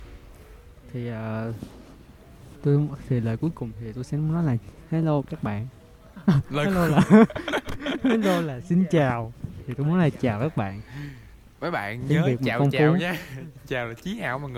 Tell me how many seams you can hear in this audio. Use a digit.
0